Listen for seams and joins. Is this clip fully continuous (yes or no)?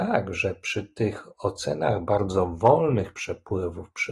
yes